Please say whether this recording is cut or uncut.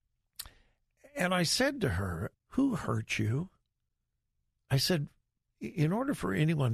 cut